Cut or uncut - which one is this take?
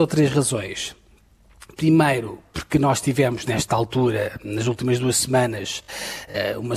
uncut